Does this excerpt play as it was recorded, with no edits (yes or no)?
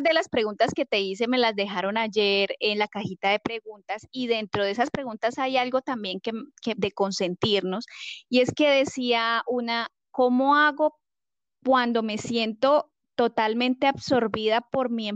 no